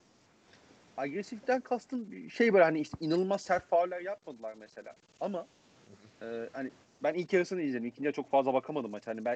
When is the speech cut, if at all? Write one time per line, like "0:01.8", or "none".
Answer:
none